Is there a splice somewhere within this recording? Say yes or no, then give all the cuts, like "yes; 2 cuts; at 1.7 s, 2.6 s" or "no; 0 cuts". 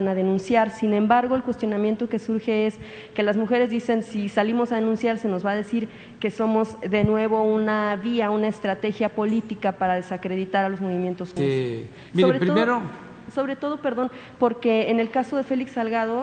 yes; 1 cut; at 11.4 s